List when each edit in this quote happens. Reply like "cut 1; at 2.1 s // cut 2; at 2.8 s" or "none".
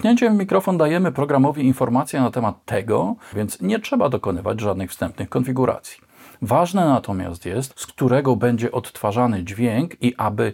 cut 1; at 3.3 s // cut 2; at 7.7 s